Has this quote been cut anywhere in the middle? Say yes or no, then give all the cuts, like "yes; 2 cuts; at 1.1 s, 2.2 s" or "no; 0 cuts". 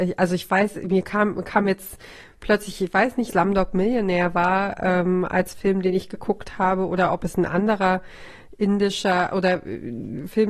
yes; 1 cut; at 3.3 s